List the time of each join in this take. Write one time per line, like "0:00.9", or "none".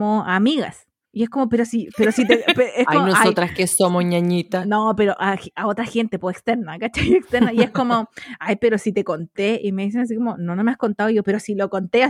0:01.0